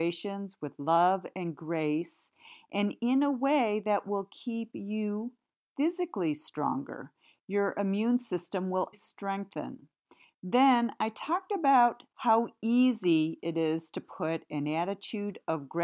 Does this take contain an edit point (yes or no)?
yes